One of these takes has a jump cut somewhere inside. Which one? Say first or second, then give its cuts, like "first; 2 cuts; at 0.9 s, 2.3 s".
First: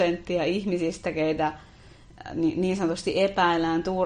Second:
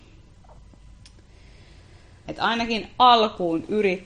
second; 1 cut; at 2.3 s